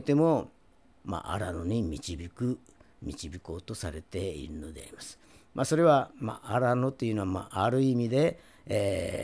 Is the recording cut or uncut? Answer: uncut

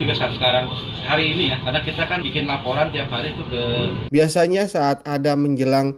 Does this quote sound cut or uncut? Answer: cut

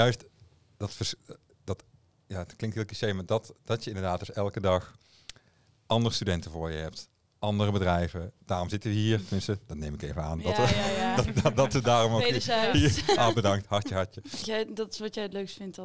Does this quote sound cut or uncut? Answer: cut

